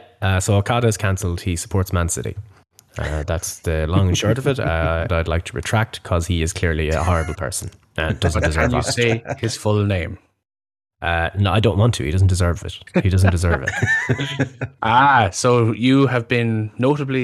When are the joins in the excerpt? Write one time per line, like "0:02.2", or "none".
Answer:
0:05.1